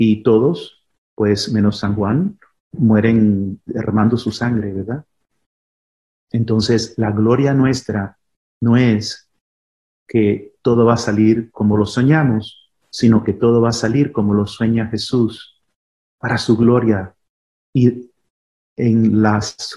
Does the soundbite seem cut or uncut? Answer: uncut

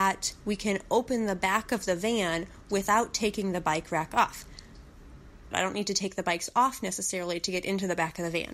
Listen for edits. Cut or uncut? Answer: cut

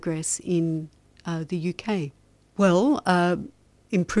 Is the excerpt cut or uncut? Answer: cut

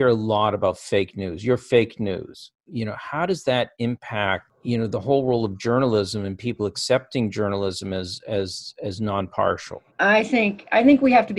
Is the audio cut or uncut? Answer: cut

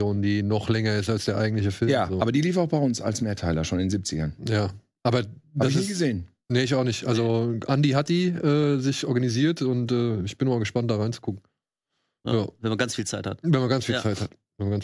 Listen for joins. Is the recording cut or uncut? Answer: uncut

